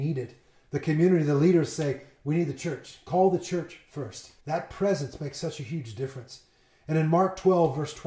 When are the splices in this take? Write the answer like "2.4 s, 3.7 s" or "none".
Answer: 4.4 s

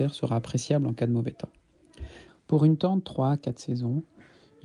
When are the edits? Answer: 2.3 s

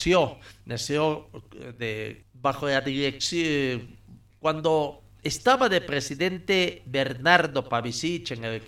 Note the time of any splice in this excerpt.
2.2 s

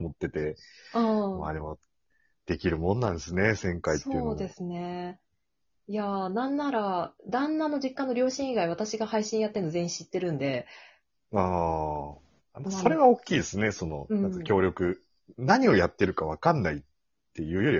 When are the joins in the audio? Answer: none

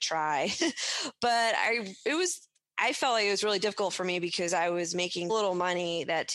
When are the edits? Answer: 5.3 s

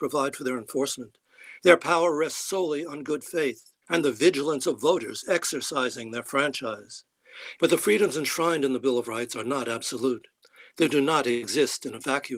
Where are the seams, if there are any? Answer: 3.8 s, 7.6 s

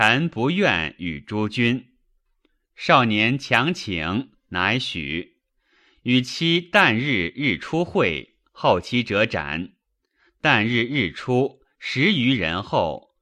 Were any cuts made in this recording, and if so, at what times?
none

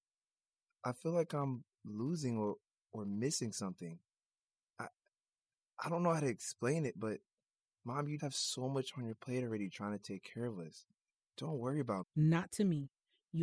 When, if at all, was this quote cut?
8.2 s, 12.0 s

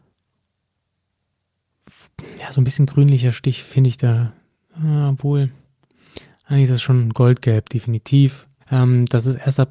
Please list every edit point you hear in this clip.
8.6 s

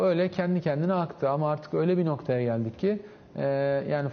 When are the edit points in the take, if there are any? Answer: none

